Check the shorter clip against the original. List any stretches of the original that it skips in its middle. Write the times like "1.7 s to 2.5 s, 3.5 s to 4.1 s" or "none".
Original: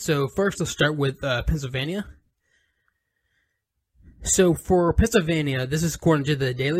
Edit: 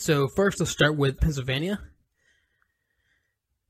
1.2 s to 1.4 s